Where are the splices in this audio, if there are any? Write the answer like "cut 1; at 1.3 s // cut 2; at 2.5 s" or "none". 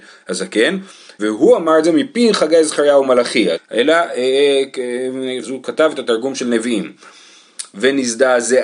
cut 1; at 1.2 s // cut 2; at 3.5 s // cut 3; at 5.4 s